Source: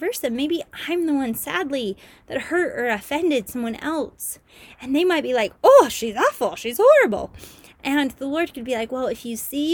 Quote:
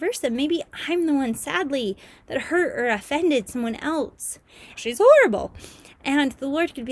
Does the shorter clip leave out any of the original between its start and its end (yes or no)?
yes